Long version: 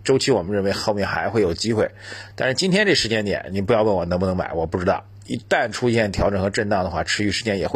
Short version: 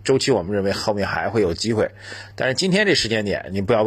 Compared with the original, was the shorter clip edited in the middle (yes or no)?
no